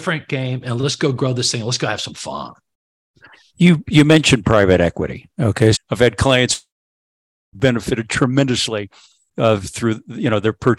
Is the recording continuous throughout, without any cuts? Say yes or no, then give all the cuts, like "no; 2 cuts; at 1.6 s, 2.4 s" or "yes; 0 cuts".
no; 1 cut; at 5.7 s